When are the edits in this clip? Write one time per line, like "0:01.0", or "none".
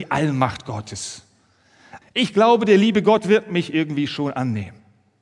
0:02.0